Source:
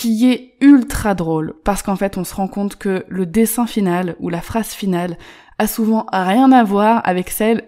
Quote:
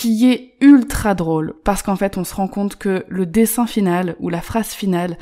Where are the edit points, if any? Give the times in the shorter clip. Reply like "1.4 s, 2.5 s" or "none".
none